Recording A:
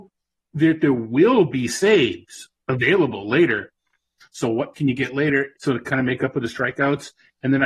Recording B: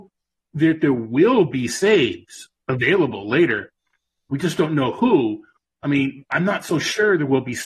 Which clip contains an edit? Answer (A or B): A